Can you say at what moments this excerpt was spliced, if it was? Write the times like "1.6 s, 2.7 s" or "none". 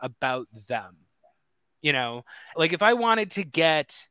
2.5 s